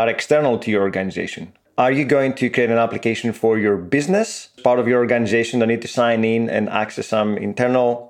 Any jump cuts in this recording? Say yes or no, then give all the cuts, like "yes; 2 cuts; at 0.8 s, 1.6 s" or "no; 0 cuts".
yes; 2 cuts; at 1.7 s, 4.6 s